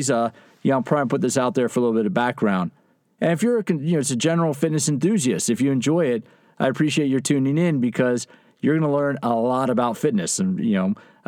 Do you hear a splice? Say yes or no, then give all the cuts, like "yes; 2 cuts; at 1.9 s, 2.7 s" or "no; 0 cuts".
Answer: no; 0 cuts